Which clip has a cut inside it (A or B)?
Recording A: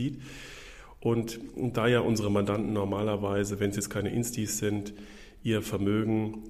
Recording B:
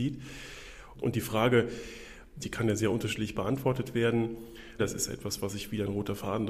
B